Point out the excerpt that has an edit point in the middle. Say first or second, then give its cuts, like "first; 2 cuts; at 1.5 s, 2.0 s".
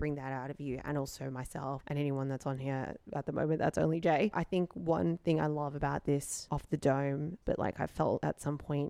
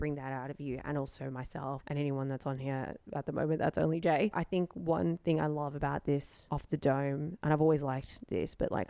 first; 1 cut; at 7.4 s